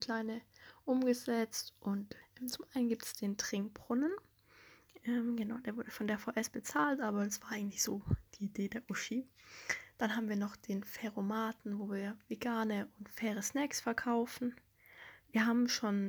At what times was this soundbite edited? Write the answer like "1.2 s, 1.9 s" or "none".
none